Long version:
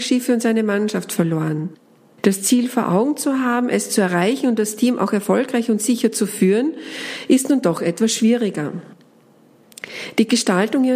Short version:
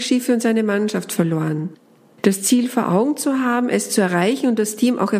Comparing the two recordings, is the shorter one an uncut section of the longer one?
yes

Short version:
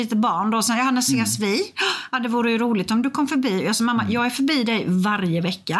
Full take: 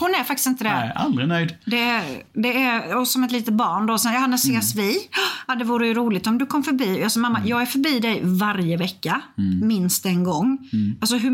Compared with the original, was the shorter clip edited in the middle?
no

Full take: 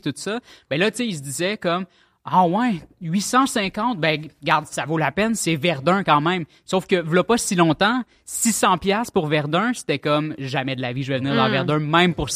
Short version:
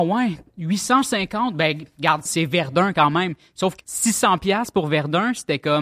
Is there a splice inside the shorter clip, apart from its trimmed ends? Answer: yes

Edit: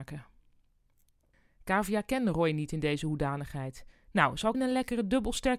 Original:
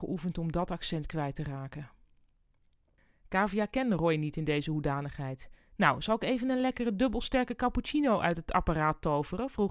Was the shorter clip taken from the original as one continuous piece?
no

